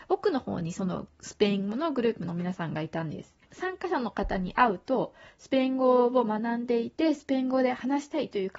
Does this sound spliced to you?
yes; 1 cut; at 3.4 s

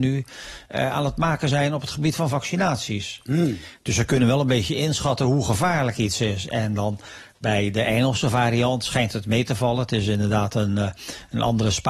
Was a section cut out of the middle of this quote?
no; 0 cuts

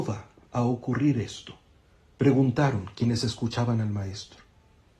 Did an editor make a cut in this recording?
no; 0 cuts

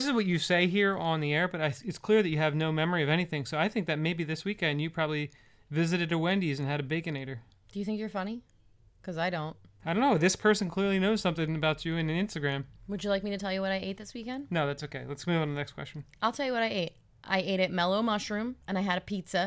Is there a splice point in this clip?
no; 0 cuts

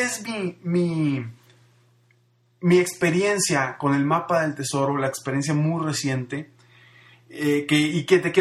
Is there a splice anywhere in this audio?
no; 0 cuts

